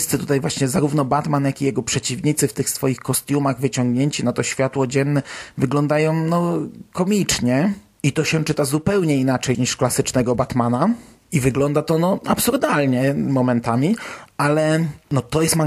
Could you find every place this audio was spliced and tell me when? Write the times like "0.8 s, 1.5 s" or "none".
9.5 s